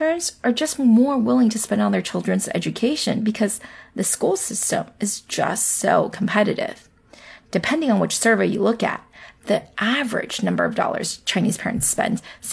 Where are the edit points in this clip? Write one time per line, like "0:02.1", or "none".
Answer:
none

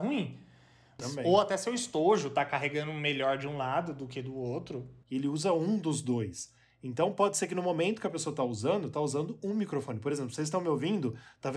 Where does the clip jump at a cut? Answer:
0:01.0
0:05.0

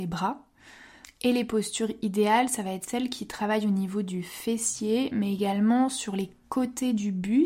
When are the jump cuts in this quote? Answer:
0:01.0

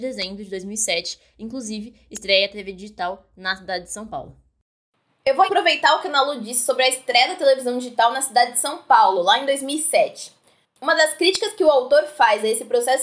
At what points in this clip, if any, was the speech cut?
0:05.5

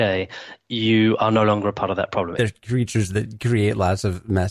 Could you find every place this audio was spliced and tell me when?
0:02.4

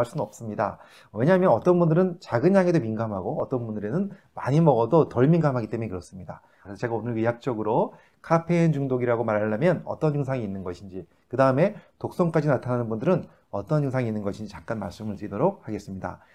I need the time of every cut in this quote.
0:06.6

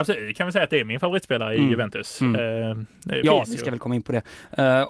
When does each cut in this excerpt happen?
0:03.2

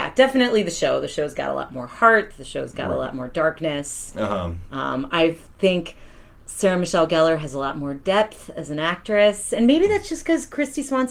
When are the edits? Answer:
none

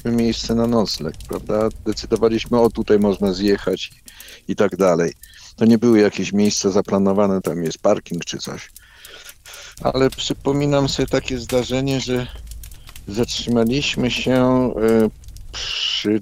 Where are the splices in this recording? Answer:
0:07.4
0:09.8

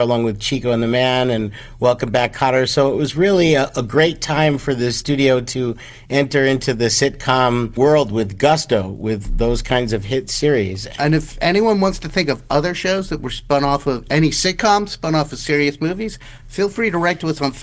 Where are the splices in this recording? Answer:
none

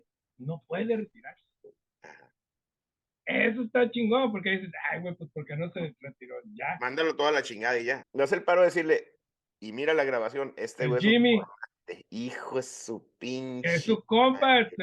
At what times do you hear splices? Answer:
0:08.0

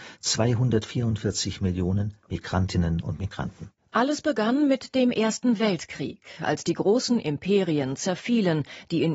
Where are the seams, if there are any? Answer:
none

